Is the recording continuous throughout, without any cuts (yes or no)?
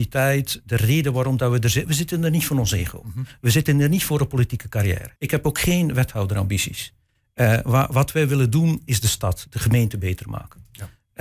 no